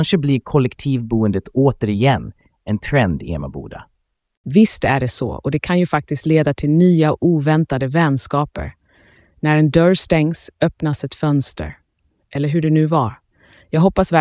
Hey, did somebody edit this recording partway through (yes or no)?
no